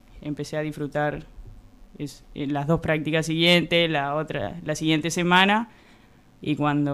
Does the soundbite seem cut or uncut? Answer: cut